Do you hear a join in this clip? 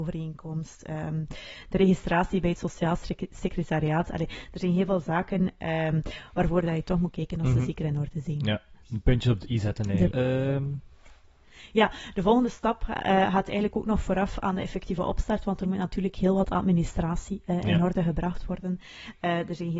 yes; 1 cut; at 10.1 s

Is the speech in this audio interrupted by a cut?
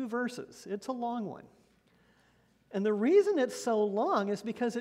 no; 0 cuts

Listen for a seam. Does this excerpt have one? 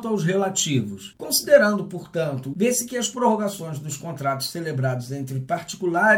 yes; 2 cuts; at 1.1 s, 2.5 s

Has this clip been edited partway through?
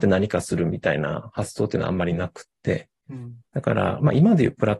no; 0 cuts

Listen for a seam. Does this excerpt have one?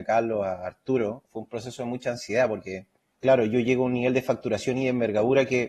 yes; 2 cuts; at 1.3 s, 3.1 s

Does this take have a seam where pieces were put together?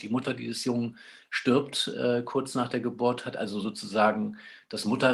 no; 0 cuts

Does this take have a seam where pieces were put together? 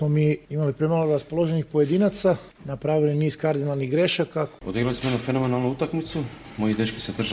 no; 0 cuts

